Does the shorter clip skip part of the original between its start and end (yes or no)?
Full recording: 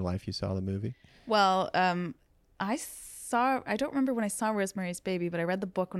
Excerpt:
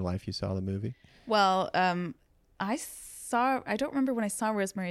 no